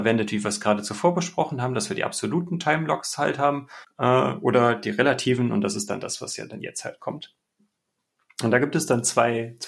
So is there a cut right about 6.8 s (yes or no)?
no